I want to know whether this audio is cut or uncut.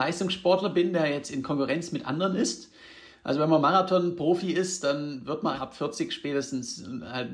cut